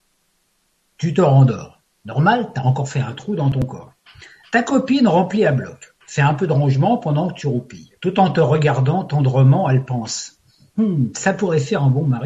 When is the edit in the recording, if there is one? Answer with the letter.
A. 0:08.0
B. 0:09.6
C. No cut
A